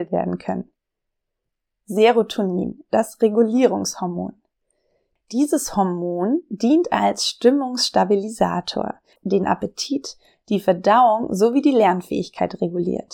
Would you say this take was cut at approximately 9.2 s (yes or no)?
yes